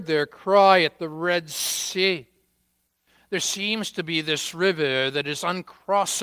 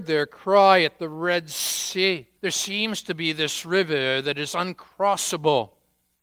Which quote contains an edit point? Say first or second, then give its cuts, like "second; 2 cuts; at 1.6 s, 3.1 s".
second; 1 cut; at 2.4 s